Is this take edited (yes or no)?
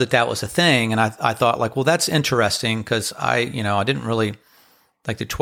no